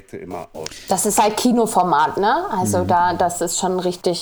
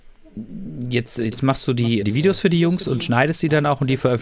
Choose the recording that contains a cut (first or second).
second